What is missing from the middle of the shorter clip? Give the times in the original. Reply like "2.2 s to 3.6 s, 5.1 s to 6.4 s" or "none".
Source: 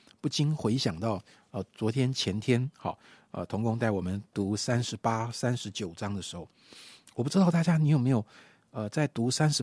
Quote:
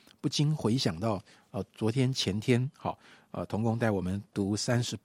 none